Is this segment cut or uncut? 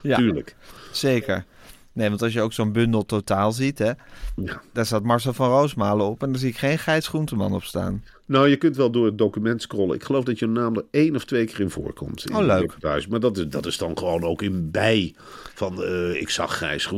uncut